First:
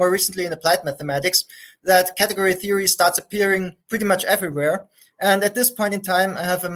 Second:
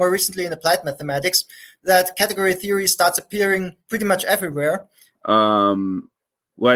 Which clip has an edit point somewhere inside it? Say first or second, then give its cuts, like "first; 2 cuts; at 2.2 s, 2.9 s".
second; 1 cut; at 5.1 s